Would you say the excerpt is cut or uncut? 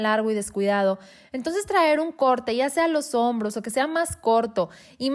uncut